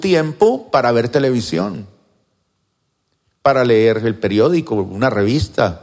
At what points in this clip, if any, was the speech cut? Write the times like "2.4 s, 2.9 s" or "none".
none